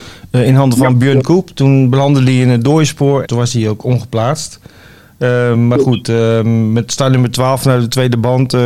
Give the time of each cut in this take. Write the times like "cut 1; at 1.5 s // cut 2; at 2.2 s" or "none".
cut 1; at 3.2 s